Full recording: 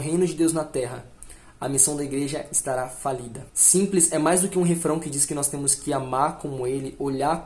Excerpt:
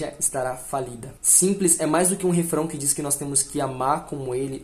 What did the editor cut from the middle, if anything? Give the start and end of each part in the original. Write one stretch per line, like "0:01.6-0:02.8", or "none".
none